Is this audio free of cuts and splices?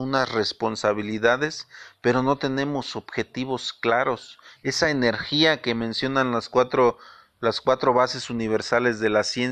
no; 1 cut; at 4.6 s

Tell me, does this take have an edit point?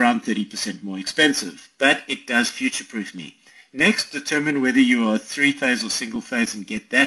no; 0 cuts

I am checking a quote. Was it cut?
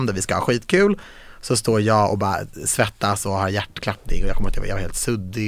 no; 0 cuts

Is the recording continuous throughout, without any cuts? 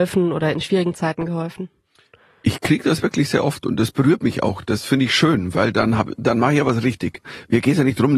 yes; 0 cuts

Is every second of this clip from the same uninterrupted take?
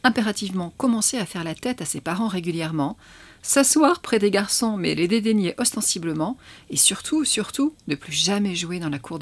yes; 0 cuts

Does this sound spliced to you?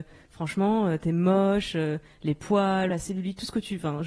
yes; 1 cut; at 2.9 s

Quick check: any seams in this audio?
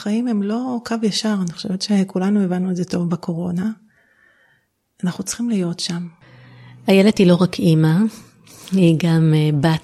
no; 0 cuts

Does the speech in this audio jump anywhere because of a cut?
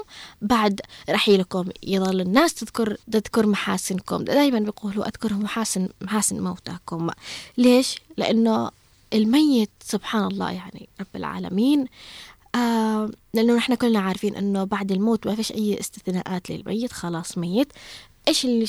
yes; 2 cuts; at 3.0 s, 9.7 s

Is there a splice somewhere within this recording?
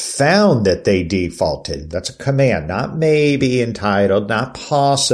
yes; 1 cut; at 1.9 s

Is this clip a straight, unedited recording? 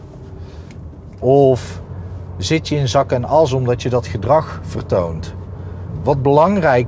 no; 1 cut; at 1.2 s

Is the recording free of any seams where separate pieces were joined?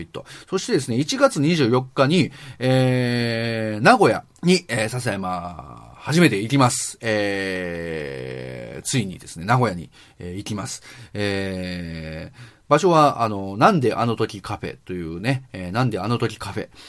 no; 1 cut; at 4.4 s

